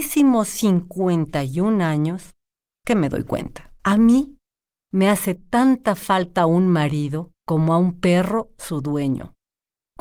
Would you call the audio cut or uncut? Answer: cut